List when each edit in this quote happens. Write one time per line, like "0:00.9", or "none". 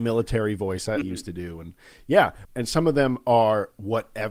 0:01.0
0:02.4

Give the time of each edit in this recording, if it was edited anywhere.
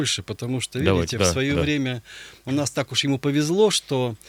none

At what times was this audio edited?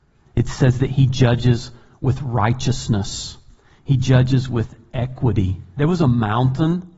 0:05.8

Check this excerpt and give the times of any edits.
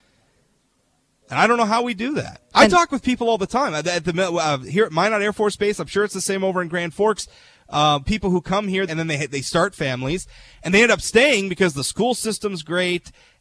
0:08.9

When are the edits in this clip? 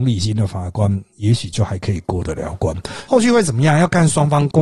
0:03.1

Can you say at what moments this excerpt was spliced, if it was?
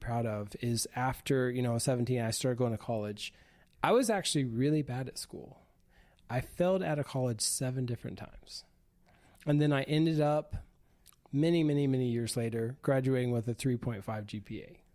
none

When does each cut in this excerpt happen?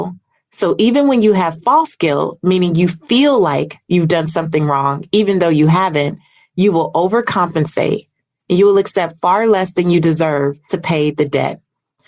0:08.4
0:10.7

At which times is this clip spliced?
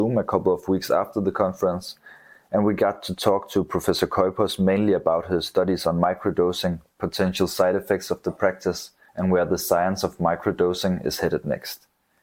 0:09.1

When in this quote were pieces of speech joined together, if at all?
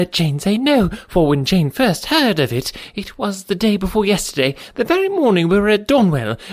none

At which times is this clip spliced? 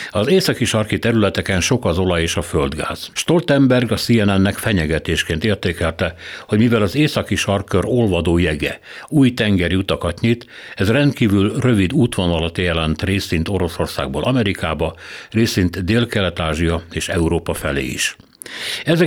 0:03.1

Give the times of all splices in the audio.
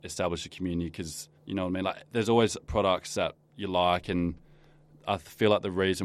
0:01.4

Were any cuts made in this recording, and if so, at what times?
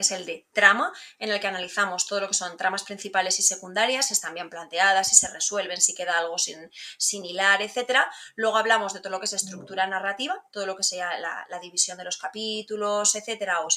0:04.1

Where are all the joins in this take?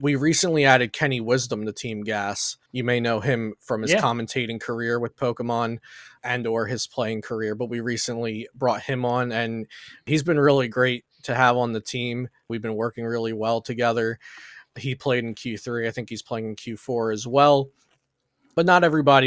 none

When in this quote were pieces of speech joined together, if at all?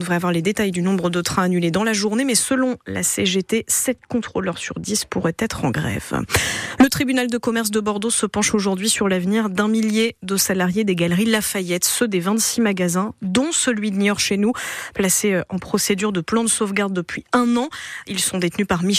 none

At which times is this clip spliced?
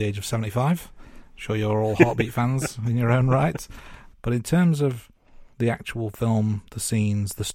0:04.1
0:05.5

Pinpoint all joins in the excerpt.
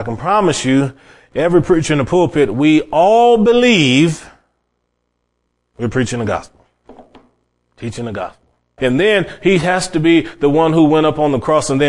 0:08.8

